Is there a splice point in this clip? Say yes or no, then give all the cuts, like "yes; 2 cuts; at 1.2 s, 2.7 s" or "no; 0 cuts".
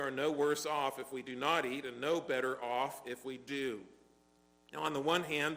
no; 0 cuts